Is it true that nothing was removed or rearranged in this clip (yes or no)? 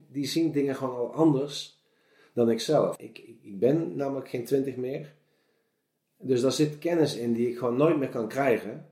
no